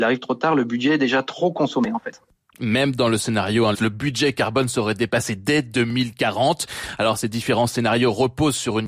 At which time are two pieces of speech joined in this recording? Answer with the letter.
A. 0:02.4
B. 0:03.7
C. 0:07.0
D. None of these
B